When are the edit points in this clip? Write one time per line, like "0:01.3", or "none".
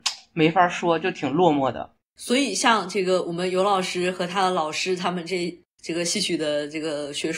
none